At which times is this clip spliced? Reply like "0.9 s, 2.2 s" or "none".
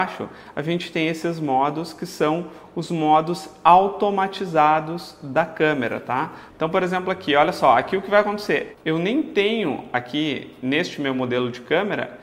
6.5 s, 8.7 s